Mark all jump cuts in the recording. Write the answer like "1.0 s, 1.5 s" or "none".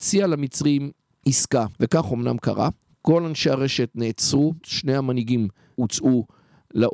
1.7 s, 4.6 s